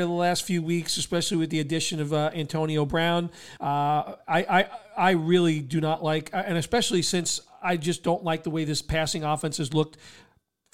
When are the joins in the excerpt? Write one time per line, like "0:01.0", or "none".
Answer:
0:03.6

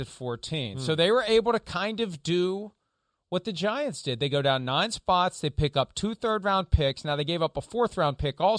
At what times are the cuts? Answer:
none

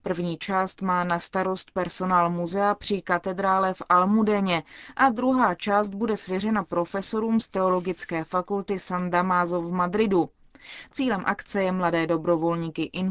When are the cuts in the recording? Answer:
none

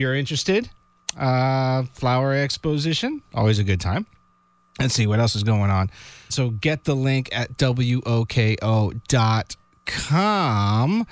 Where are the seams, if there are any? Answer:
0:06.3

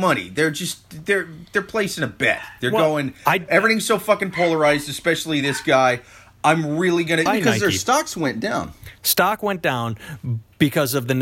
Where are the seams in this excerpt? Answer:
0:07.3

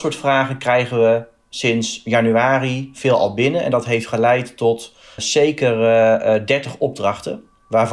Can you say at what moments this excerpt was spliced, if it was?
0:05.2

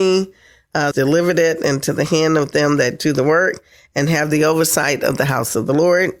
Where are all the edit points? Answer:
0:00.9

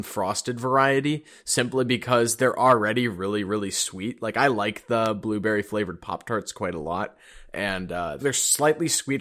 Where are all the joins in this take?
0:08.2

